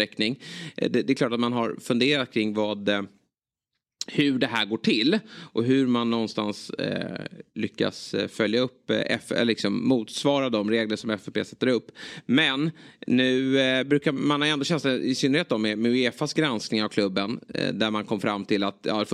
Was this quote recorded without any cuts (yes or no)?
yes